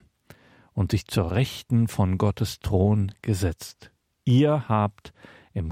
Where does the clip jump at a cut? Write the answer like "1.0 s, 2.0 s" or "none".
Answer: 4.1 s